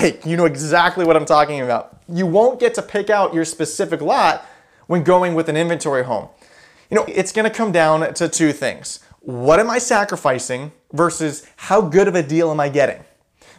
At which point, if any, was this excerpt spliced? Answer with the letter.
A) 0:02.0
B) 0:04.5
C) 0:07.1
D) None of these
C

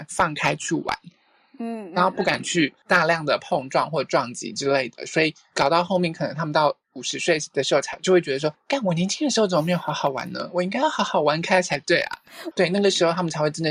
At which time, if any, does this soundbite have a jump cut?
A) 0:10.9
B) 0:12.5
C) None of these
B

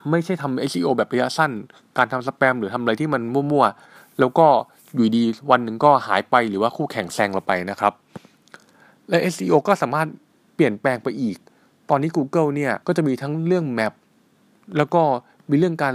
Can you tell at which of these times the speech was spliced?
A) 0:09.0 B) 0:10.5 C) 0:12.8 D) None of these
C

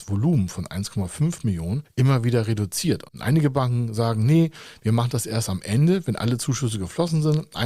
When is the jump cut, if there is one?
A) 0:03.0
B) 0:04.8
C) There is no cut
A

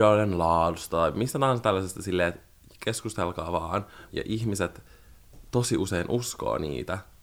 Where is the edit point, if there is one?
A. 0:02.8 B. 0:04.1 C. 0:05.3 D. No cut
B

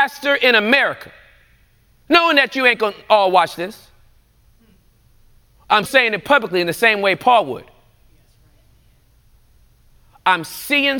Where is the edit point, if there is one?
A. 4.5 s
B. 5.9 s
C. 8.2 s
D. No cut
B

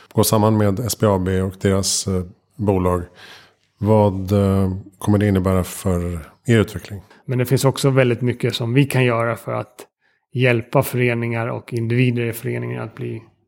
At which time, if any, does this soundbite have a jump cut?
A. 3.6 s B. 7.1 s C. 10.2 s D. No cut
B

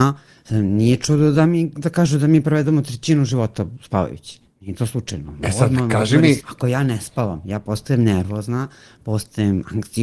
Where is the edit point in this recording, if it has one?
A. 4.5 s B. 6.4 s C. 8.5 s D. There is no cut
B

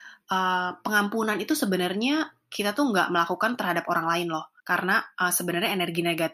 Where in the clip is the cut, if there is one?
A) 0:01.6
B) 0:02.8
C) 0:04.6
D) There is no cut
C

